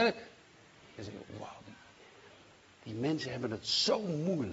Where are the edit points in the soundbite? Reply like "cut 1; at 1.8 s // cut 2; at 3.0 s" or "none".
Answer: cut 1; at 1.0 s